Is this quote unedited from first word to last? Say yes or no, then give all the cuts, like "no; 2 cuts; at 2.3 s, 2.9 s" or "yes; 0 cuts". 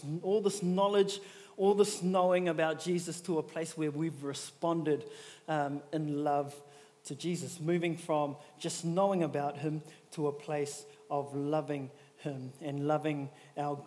yes; 0 cuts